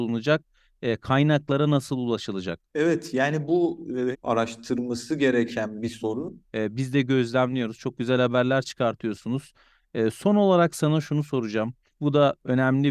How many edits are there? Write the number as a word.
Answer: two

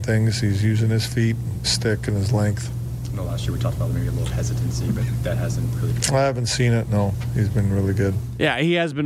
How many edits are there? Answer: one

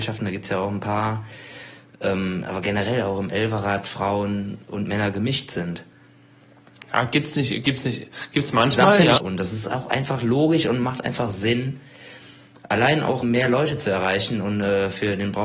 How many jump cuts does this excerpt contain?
two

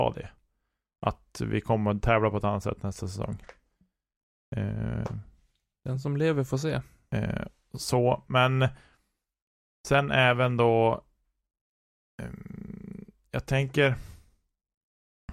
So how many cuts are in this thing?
zero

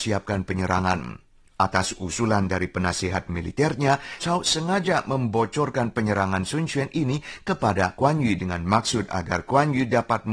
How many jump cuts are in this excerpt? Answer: one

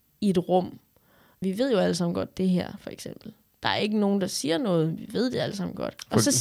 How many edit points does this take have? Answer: one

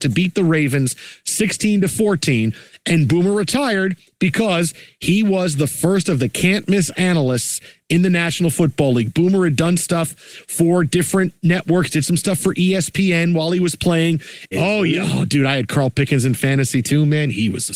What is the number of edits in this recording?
one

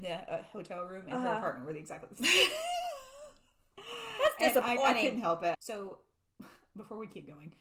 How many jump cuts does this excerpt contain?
one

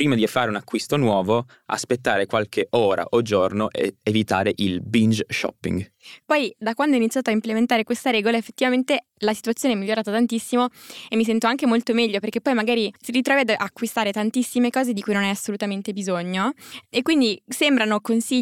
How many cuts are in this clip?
two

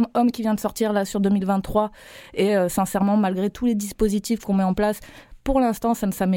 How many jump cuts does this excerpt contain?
zero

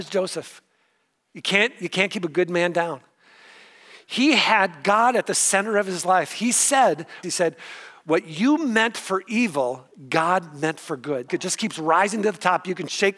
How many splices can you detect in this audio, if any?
two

